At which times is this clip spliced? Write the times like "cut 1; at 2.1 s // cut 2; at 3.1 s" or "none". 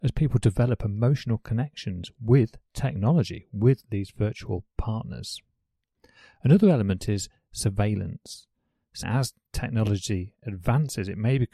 cut 1; at 9.0 s

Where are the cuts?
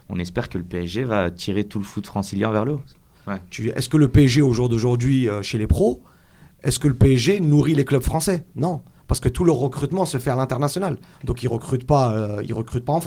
cut 1; at 3.1 s // cut 2; at 8.5 s // cut 3; at 11.1 s

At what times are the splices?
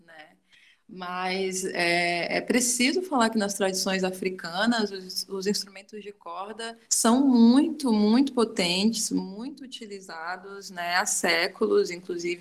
cut 1; at 6.8 s

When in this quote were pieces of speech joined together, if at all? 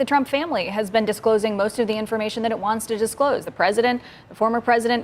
none

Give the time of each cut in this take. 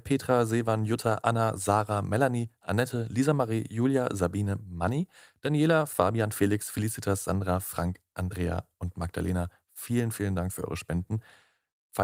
none

